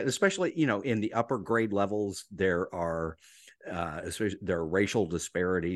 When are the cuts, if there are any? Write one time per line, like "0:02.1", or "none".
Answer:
none